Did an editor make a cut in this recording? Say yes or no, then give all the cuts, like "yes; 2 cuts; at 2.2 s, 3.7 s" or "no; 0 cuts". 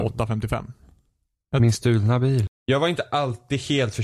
yes; 1 cut; at 2.5 s